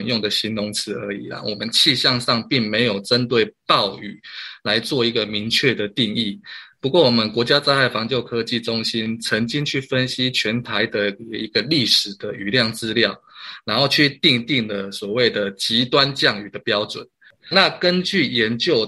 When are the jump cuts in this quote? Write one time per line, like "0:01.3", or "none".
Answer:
0:17.5